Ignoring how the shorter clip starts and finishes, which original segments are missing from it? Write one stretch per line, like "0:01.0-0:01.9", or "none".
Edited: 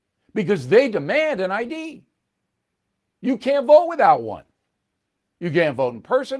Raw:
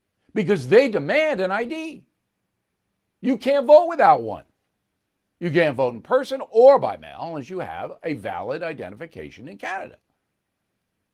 none